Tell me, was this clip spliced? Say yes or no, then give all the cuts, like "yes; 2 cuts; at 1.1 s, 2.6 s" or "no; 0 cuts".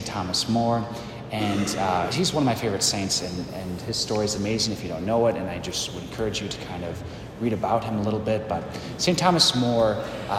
yes; 1 cut; at 2.1 s